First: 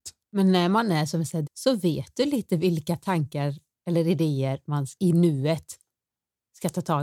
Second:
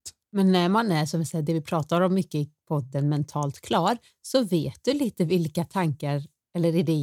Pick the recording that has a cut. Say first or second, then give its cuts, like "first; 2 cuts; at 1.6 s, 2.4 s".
first; 2 cuts; at 1.5 s, 5.0 s